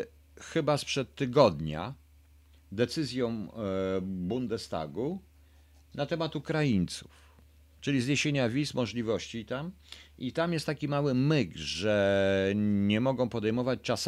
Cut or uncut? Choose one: uncut